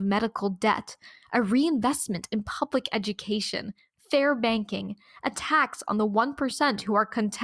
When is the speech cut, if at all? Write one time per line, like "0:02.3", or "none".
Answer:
none